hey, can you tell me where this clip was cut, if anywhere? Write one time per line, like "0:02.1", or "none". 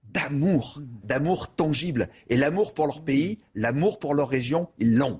0:01.0